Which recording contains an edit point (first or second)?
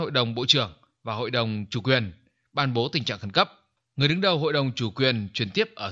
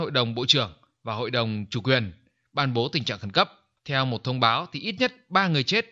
second